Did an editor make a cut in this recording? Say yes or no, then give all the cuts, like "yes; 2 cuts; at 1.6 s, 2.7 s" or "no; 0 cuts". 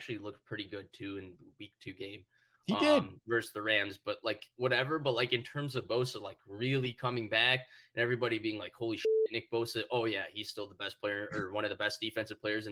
no; 0 cuts